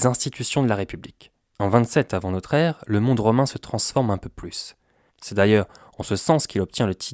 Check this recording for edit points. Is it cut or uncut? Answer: cut